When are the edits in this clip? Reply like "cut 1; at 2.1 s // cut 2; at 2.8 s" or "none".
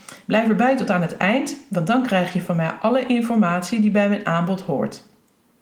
none